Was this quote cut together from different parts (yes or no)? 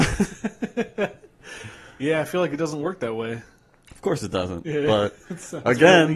no